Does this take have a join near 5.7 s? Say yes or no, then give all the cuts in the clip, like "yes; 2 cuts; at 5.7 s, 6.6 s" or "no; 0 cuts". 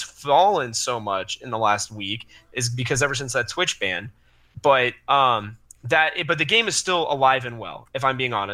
no; 0 cuts